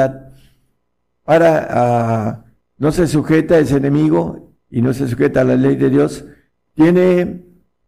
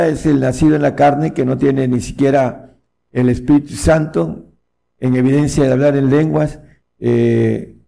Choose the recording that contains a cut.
second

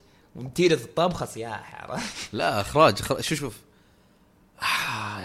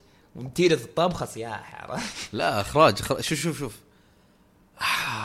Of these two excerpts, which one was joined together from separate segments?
first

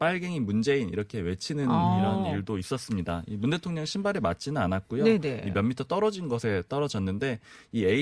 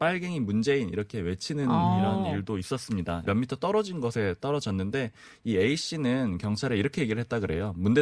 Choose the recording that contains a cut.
second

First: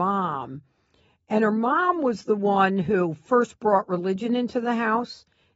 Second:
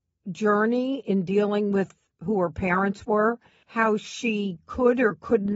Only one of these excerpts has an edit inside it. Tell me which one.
second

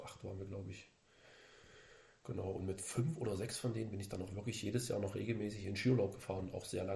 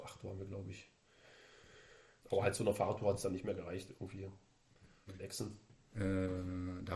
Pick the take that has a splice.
second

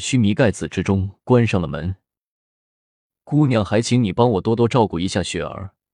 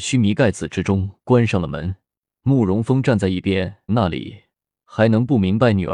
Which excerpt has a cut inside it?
second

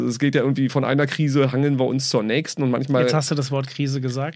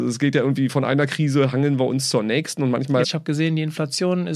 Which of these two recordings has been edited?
second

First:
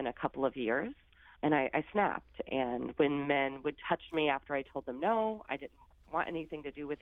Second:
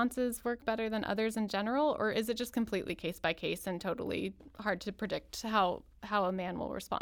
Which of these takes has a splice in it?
first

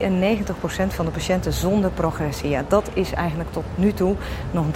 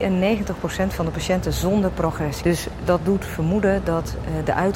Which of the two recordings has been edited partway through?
second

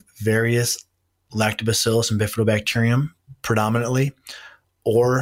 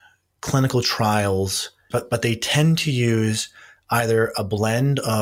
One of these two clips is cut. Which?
second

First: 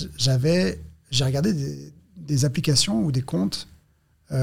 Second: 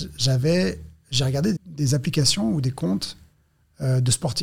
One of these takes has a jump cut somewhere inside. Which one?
second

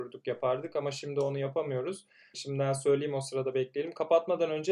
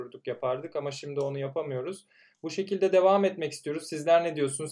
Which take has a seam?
first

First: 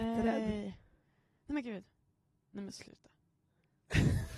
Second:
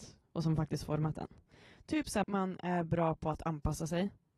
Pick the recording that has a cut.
second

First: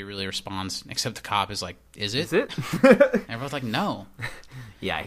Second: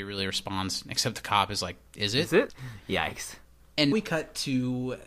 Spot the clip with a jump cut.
second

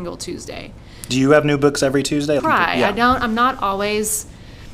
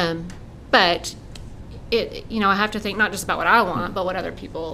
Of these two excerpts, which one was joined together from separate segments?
first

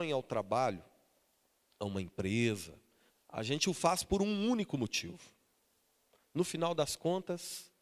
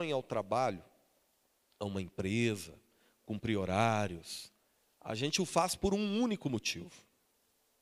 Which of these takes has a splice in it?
first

